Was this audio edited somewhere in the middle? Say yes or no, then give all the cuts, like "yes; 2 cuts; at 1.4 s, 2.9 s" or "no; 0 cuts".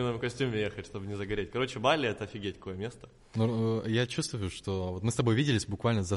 no; 0 cuts